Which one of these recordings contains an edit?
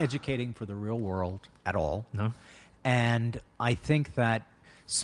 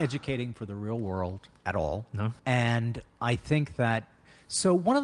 second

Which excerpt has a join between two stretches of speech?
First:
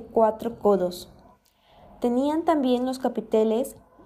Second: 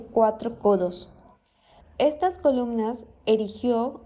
second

